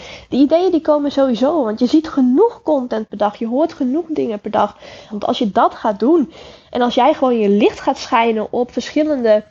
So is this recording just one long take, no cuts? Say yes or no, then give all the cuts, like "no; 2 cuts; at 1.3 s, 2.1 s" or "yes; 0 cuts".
no; 1 cut; at 5.1 s